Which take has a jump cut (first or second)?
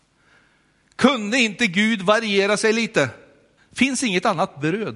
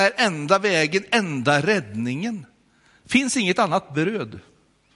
first